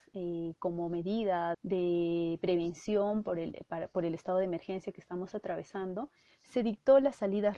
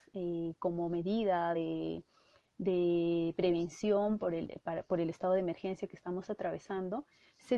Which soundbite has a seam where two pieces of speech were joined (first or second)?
first